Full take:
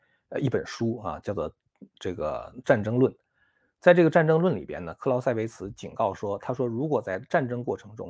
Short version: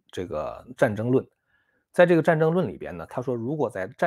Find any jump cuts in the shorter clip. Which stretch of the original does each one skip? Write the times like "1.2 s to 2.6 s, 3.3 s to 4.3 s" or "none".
4.9 s to 6.4 s